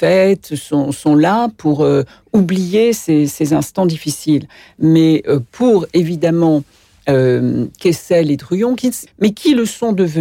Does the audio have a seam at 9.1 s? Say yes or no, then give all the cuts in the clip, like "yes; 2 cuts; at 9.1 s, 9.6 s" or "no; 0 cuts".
yes; 1 cut; at 9.1 s